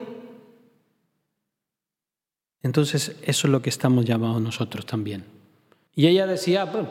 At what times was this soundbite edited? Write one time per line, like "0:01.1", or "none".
0:05.9